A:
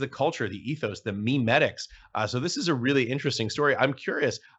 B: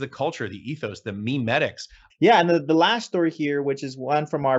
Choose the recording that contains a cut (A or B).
B